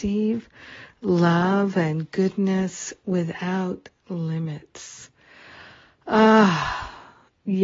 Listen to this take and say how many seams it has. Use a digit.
0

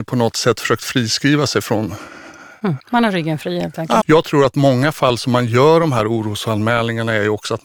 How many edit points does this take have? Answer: 2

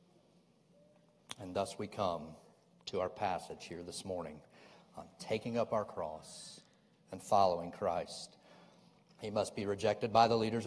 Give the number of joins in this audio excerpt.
1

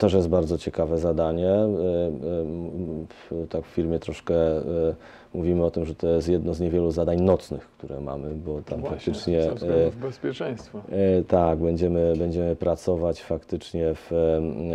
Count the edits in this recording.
0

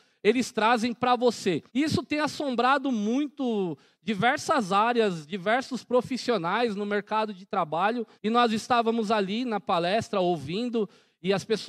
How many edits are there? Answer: 2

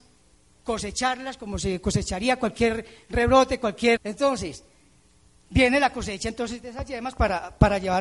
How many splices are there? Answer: 1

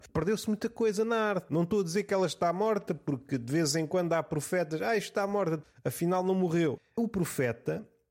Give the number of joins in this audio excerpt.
1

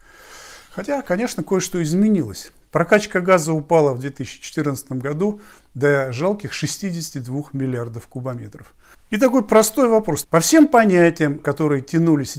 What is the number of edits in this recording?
3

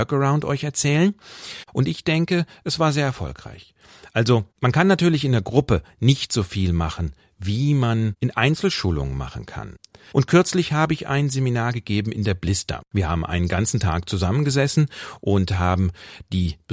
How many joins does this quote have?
2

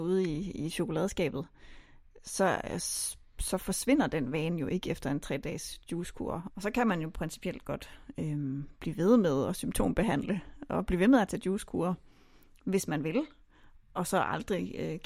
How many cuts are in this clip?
1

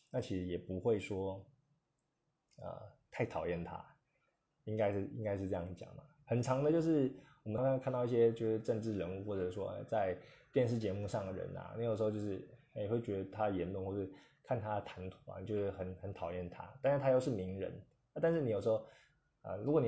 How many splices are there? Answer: 1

